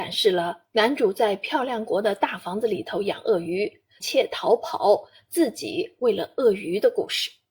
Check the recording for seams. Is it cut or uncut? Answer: cut